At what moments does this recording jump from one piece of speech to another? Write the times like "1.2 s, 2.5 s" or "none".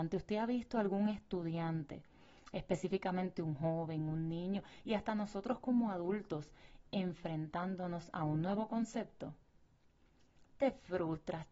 none